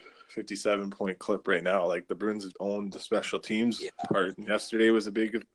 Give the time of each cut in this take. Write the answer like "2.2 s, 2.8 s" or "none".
2.5 s